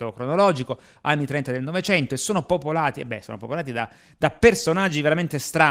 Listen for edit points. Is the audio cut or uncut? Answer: uncut